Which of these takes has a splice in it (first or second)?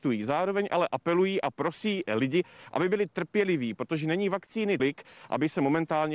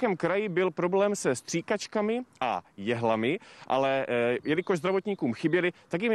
first